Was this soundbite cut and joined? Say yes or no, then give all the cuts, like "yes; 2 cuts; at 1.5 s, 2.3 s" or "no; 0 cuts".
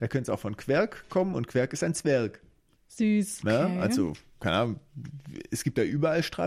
yes; 1 cut; at 3.4 s